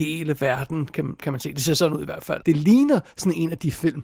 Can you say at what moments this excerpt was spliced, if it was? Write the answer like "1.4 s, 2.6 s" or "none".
2.4 s